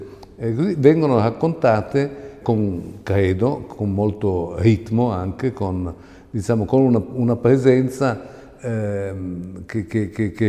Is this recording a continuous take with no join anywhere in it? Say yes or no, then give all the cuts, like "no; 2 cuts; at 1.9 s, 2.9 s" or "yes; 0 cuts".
no; 1 cut; at 2.4 s